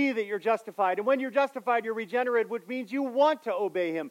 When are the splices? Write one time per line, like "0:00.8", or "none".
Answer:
none